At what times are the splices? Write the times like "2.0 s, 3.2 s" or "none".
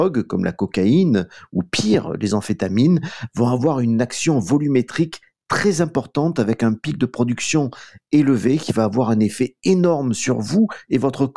none